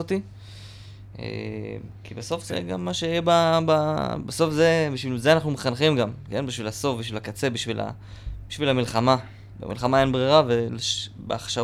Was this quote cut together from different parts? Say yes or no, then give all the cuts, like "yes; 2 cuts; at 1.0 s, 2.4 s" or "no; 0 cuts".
no; 0 cuts